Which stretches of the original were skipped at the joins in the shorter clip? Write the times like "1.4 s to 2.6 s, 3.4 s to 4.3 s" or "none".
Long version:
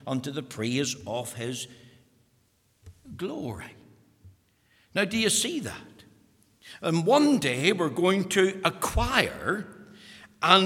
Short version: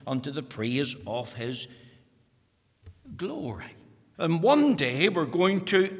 4.1 s to 6.8 s